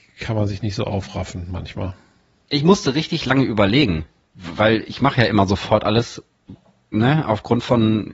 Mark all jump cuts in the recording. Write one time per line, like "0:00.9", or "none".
none

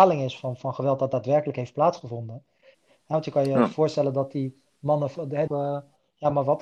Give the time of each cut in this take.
0:02.7
0:05.5

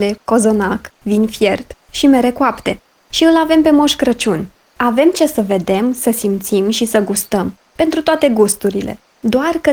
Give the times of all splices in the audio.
0:04.7

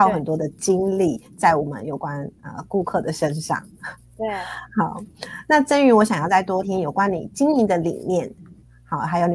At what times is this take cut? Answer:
0:06.6

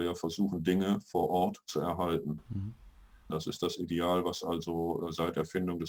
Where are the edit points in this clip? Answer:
0:03.3

